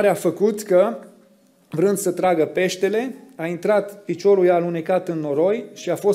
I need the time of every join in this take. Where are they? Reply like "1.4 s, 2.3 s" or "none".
none

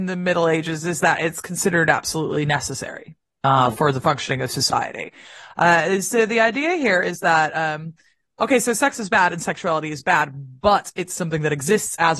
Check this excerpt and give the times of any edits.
none

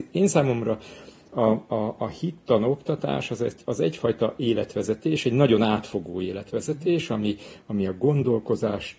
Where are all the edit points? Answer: none

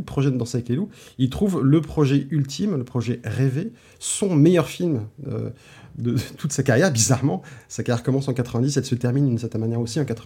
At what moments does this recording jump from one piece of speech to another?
none

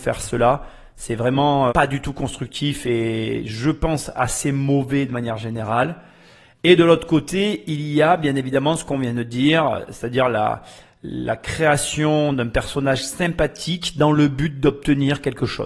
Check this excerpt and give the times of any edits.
1.7 s

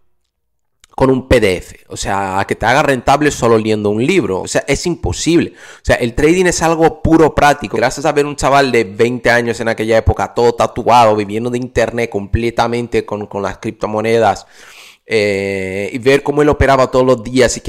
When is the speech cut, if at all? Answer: 4.4 s, 7.7 s

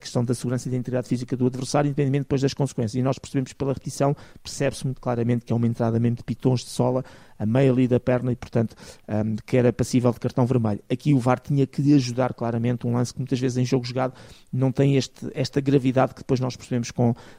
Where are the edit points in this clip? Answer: none

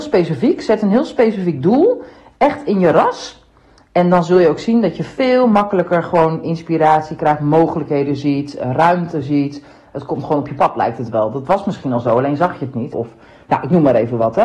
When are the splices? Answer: 12.9 s

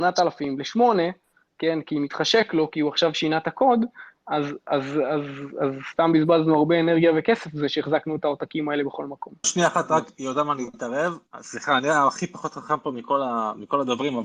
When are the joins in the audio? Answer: 9.4 s

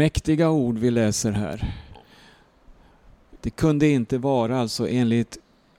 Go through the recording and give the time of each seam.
3.4 s

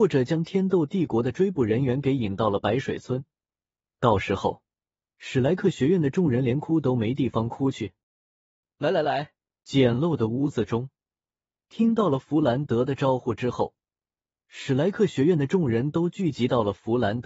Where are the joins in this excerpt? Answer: 9.5 s

